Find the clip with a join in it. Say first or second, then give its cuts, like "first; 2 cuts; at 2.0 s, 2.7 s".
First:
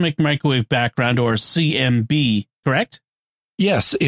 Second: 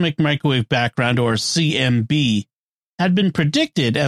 first; 1 cut; at 2.6 s